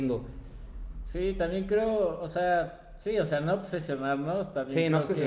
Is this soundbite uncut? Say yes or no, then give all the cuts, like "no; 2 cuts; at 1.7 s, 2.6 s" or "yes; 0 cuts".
yes; 0 cuts